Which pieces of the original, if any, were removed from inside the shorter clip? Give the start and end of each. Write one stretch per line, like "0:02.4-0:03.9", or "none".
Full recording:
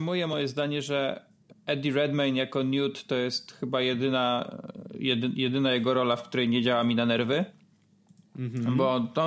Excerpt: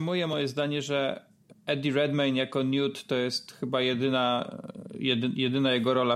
none